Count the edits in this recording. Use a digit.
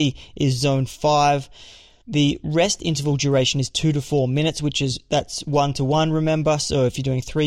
0